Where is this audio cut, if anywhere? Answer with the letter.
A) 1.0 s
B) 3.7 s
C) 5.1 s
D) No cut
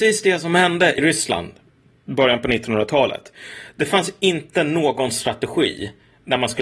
A